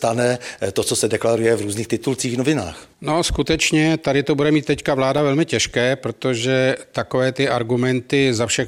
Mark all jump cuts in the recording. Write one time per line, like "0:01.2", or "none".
0:02.9